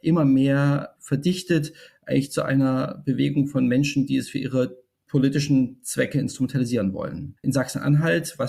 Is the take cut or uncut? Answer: cut